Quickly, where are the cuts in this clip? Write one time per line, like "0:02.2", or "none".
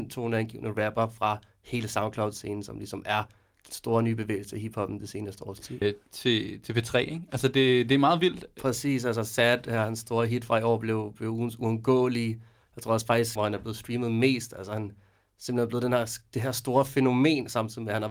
0:05.8
0:13.4